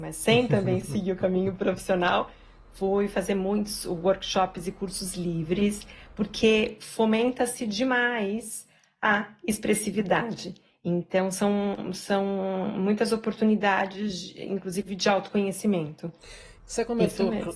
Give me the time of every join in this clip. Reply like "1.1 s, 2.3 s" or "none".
10.7 s, 16.6 s